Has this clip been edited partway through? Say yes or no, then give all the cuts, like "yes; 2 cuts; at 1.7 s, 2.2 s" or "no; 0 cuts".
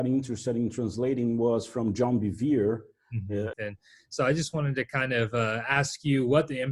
yes; 1 cut; at 3.5 s